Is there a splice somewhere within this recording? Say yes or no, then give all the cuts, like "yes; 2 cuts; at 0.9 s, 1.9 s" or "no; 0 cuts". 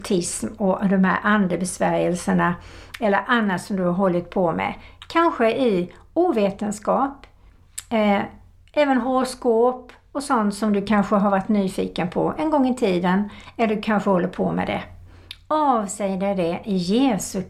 no; 0 cuts